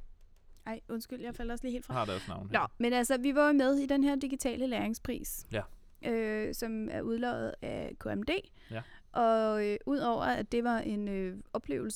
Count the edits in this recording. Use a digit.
1